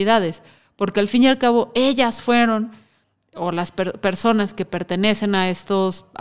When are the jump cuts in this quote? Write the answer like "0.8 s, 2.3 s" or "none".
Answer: none